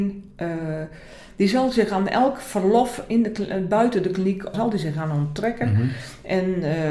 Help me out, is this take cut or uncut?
cut